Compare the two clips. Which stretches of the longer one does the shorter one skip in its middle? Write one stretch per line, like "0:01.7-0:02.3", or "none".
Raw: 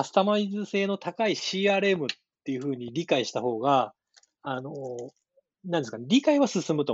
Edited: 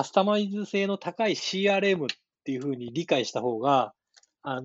none